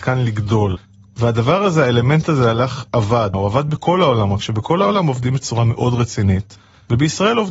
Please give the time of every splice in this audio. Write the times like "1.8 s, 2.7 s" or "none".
3.3 s